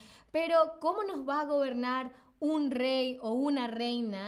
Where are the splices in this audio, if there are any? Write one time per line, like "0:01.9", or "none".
none